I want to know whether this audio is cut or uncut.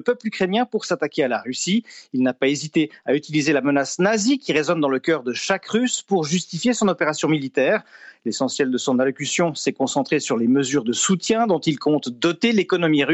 uncut